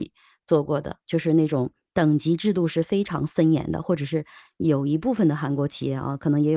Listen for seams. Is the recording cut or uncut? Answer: uncut